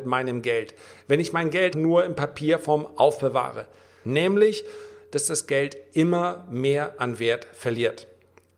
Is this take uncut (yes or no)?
no